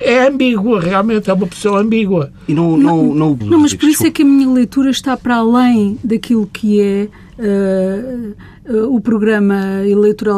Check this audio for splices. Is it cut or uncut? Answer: cut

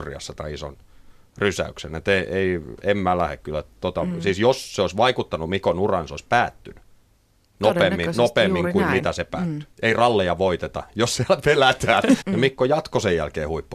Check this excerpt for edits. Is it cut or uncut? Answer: cut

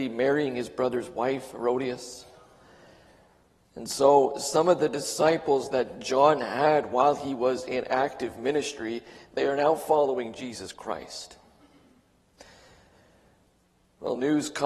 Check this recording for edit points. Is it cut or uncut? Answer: uncut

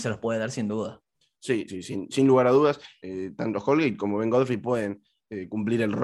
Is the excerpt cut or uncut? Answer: cut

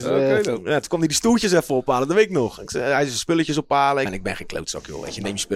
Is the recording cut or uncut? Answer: cut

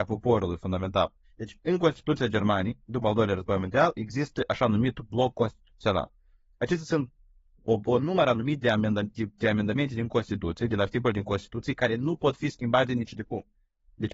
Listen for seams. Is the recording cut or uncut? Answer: cut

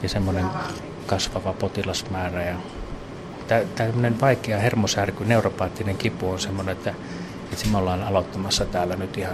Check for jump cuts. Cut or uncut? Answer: uncut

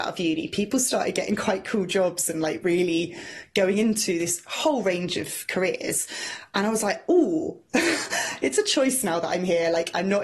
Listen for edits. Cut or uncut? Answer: uncut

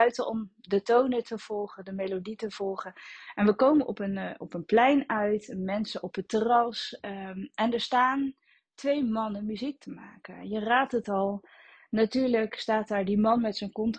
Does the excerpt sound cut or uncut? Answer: uncut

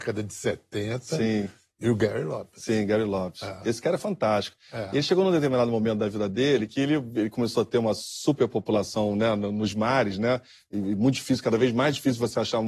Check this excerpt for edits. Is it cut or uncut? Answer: uncut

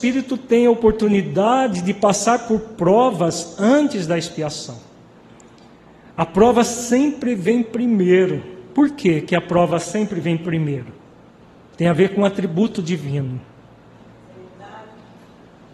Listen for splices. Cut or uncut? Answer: uncut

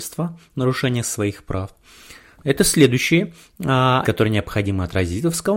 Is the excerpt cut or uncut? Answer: cut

